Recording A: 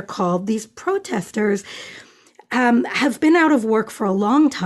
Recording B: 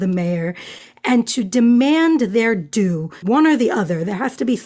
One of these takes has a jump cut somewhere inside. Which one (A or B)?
B